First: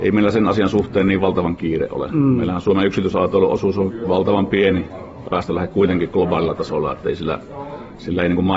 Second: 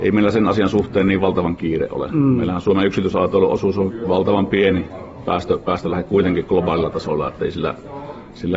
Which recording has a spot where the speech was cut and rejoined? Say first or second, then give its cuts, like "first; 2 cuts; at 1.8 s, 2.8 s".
first; 1 cut; at 5.2 s